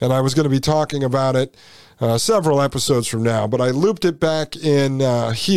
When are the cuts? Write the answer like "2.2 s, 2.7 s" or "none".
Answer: none